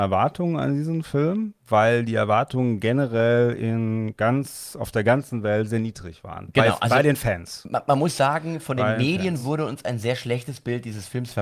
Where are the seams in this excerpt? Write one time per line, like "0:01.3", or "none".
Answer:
none